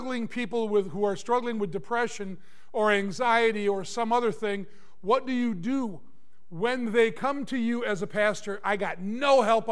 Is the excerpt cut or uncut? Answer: uncut